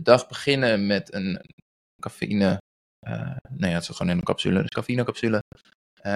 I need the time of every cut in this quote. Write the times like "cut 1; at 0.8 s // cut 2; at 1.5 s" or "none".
cut 1; at 1.3 s